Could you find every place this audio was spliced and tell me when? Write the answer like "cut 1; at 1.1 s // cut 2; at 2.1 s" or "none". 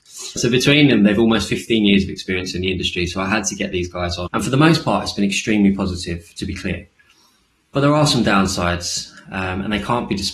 cut 1; at 4.3 s